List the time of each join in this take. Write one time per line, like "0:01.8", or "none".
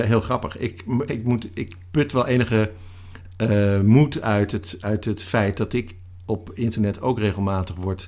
0:01.1